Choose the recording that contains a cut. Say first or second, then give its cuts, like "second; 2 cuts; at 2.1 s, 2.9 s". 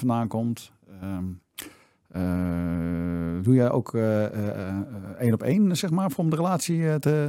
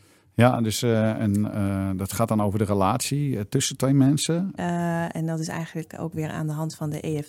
second; 1 cut; at 4.6 s